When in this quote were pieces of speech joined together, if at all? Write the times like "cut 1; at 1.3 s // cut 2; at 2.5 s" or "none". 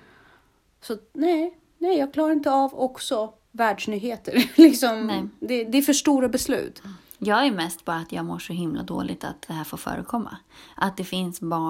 cut 1; at 5.7 s